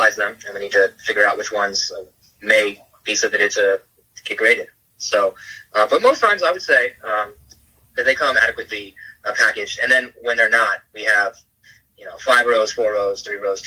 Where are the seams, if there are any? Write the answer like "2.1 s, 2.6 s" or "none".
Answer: none